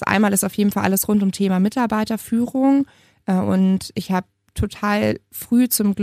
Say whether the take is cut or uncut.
uncut